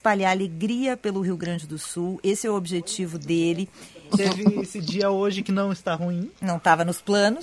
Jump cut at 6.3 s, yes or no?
no